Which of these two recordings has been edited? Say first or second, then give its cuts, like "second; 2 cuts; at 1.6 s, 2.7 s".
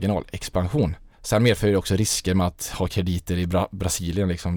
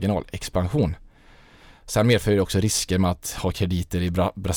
first; 1 cut; at 1.1 s